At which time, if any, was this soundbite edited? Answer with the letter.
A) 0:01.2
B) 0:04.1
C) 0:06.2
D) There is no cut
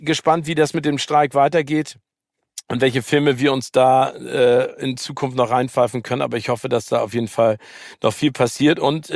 D